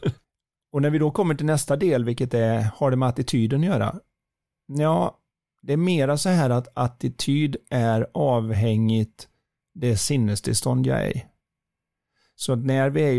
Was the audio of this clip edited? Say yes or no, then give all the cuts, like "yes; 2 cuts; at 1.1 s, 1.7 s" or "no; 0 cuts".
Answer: no; 0 cuts